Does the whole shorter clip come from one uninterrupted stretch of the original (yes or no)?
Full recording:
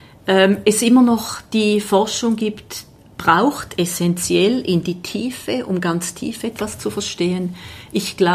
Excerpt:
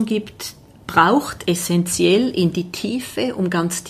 yes